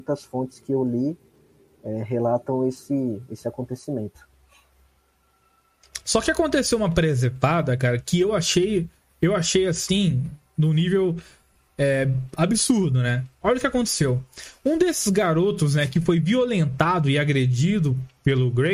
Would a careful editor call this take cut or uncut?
uncut